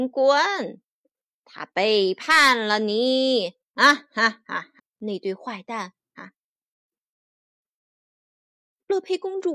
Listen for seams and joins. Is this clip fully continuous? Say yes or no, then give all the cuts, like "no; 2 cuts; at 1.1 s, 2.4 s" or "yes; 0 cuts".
no; 2 cuts; at 4.8 s, 6.1 s